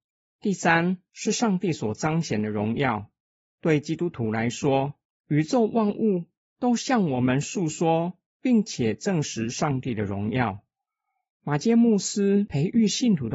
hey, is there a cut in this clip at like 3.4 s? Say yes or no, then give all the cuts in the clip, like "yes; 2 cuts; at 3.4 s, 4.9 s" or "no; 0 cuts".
yes; 1 cut; at 3.4 s